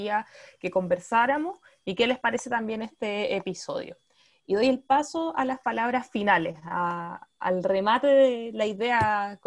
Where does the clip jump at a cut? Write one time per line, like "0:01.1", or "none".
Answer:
none